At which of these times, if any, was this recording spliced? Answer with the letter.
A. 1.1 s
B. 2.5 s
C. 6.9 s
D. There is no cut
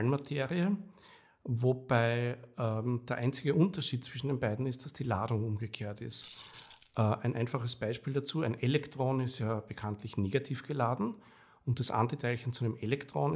D